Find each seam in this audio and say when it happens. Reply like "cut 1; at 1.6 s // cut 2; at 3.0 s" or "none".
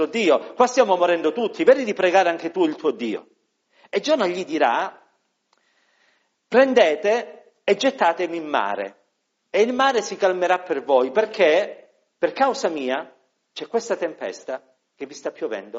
none

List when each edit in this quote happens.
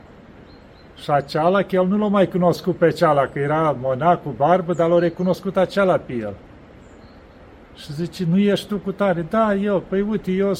none

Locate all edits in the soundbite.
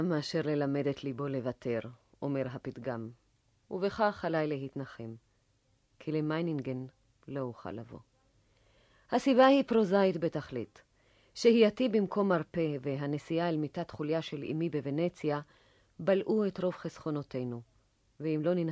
none

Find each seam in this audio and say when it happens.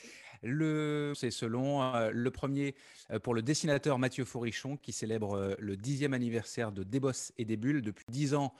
cut 1; at 1.1 s

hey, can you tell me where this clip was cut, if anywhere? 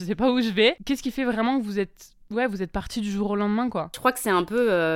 none

